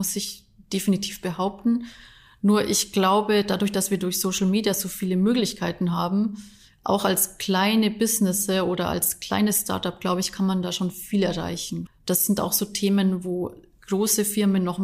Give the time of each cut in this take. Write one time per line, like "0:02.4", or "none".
0:11.9